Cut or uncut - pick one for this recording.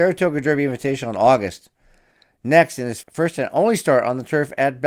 cut